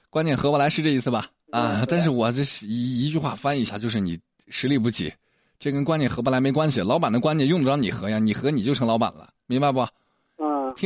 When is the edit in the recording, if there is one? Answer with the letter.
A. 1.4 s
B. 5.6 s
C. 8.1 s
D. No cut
A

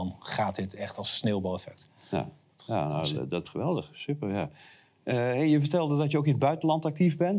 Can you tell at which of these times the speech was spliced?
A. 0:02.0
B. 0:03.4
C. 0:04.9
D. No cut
B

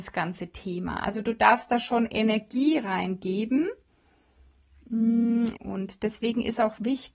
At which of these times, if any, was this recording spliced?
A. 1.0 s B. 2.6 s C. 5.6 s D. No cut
C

